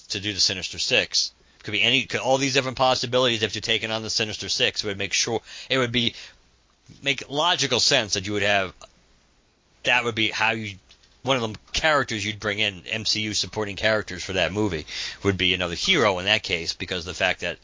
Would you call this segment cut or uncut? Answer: cut